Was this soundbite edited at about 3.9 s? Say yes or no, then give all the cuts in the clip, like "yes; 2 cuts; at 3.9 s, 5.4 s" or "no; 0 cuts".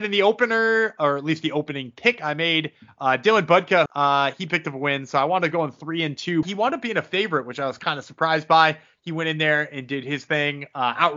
yes; 2 cuts; at 3.9 s, 6.4 s